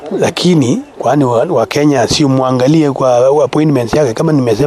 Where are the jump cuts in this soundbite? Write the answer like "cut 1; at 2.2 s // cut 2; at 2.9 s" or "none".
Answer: none